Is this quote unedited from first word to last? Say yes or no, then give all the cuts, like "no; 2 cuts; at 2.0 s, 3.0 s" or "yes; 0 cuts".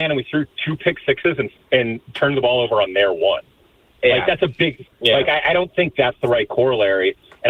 no; 1 cut; at 4.8 s